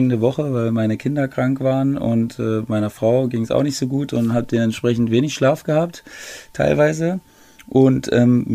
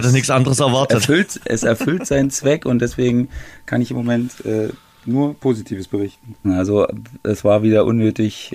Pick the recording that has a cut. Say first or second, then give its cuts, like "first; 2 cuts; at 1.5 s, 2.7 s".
second; 1 cut; at 6.4 s